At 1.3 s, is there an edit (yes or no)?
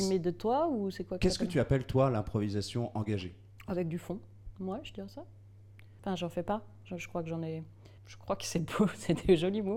no